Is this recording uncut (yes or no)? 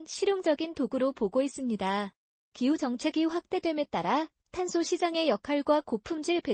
yes